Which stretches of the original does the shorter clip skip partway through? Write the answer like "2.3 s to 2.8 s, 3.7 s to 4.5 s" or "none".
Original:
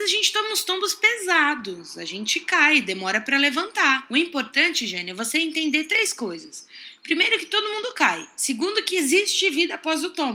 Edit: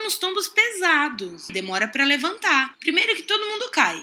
2.0 s to 2.8 s, 4.1 s to 7.0 s